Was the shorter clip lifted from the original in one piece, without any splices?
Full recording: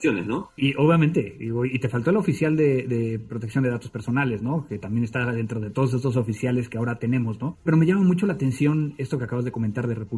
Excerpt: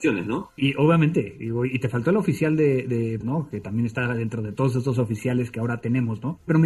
no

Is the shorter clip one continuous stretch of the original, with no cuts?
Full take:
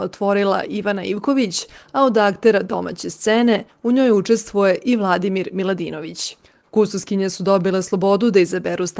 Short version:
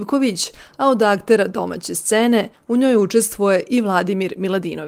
yes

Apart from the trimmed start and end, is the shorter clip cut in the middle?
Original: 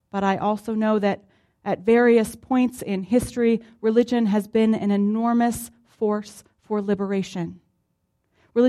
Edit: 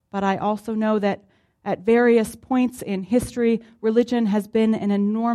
no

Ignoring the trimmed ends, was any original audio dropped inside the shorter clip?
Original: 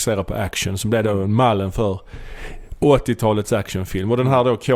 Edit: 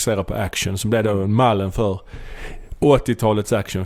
no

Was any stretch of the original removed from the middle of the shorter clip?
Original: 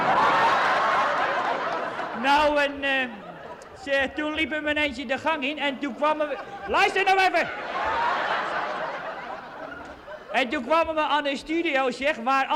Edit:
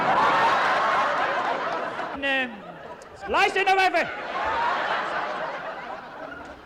yes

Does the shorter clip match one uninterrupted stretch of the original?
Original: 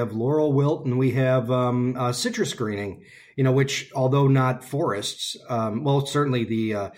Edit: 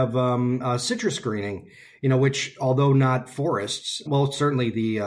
no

